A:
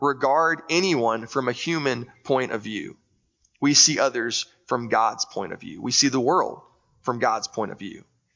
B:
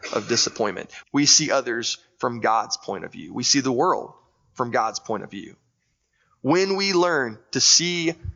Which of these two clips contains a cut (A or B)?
B